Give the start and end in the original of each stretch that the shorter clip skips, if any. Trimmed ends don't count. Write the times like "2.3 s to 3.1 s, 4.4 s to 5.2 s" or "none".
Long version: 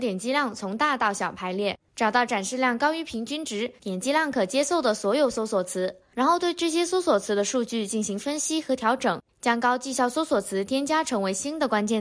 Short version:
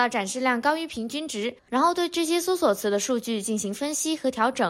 3.8 s to 6.0 s